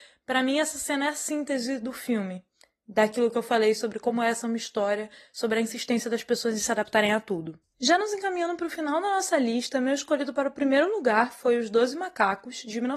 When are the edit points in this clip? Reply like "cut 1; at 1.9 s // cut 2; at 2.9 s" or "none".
none